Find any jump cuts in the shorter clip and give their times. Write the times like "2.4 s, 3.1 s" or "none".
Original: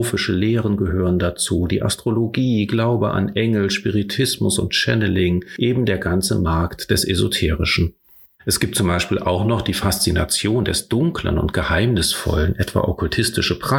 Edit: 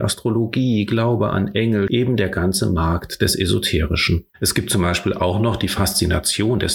1.9 s, 4.3 s